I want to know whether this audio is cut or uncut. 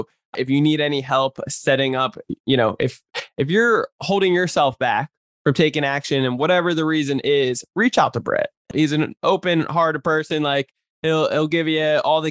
uncut